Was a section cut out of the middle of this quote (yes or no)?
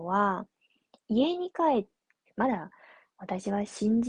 yes